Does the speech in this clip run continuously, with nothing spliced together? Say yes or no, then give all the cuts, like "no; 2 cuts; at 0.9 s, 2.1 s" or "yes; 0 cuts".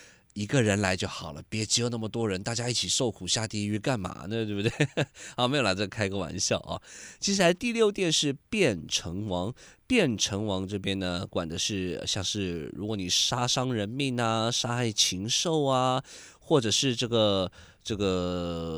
yes; 0 cuts